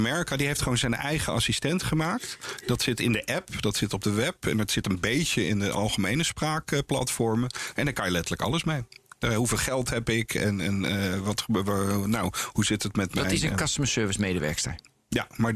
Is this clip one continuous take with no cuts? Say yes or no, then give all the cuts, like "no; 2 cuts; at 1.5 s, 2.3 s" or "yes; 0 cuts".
yes; 0 cuts